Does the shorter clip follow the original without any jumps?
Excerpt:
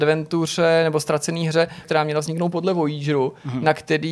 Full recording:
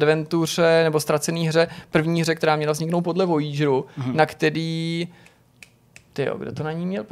no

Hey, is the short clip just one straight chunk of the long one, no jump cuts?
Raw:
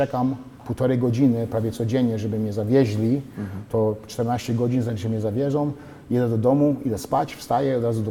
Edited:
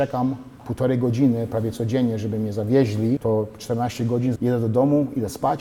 no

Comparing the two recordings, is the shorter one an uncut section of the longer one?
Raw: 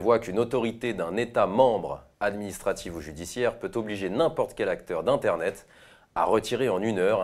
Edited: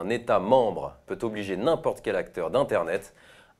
no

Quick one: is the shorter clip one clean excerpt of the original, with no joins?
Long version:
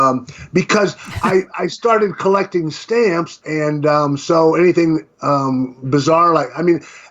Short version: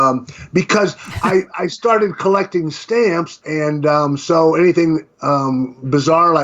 yes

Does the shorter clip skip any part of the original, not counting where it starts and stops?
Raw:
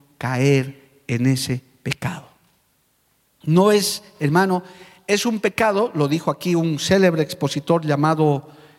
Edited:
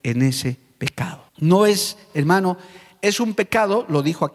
yes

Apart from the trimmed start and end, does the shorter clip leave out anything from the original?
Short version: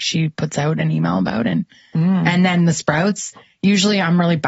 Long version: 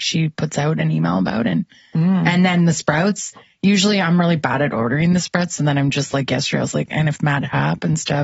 no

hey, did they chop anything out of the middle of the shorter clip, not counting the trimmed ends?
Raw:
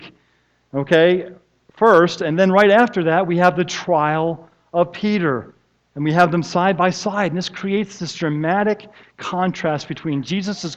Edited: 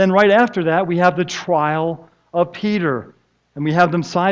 no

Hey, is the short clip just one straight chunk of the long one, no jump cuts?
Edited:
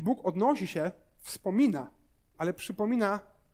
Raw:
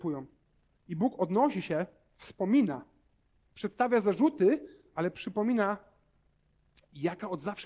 no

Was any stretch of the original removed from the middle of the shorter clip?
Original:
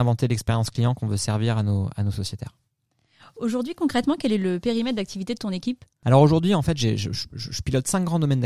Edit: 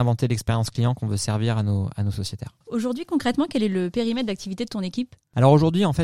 yes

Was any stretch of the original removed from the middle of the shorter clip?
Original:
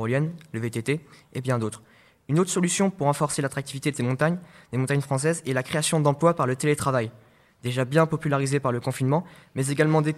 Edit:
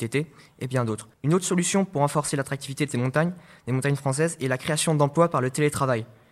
yes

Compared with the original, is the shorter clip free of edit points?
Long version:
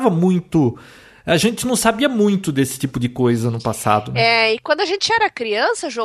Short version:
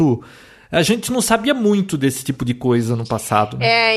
yes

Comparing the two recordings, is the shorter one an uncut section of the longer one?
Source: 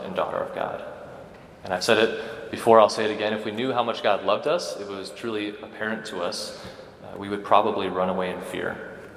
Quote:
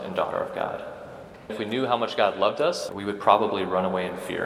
no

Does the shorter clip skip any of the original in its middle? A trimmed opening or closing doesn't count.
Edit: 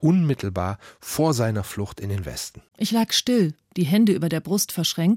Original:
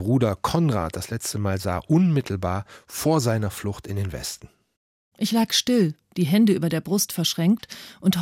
yes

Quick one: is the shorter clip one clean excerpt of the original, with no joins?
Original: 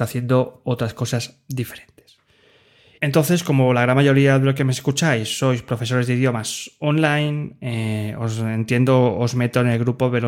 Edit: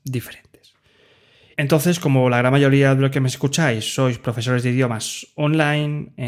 yes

